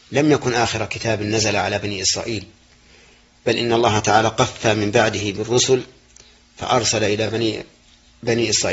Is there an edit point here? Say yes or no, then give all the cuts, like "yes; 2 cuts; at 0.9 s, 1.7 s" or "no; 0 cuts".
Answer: no; 0 cuts